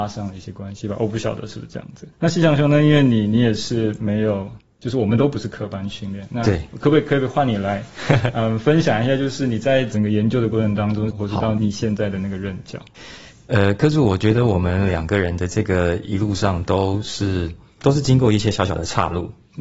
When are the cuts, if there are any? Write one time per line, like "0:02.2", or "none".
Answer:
0:02.1
0:11.1